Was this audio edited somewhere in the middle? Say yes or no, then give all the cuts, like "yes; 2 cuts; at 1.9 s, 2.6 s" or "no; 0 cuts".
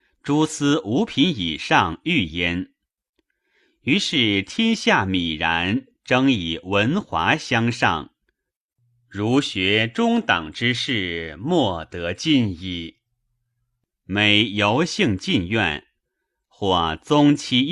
yes; 1 cut; at 13.9 s